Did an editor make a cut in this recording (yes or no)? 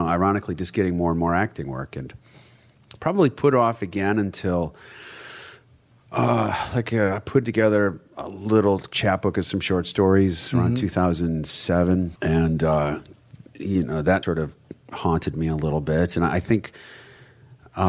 yes